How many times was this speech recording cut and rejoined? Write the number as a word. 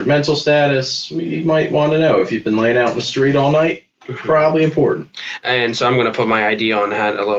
zero